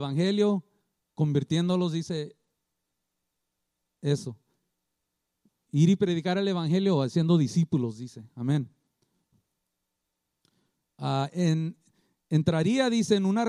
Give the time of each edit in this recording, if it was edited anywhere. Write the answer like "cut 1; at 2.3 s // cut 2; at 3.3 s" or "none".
none